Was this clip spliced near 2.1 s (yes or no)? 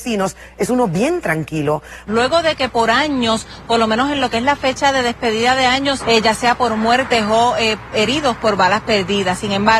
yes